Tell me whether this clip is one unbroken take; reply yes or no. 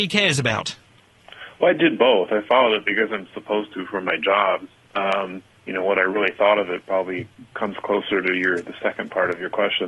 yes